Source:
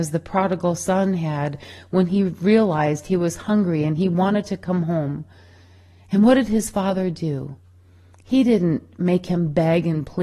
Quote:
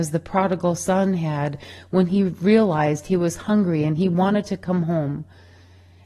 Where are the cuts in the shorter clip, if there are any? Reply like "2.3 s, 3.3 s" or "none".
none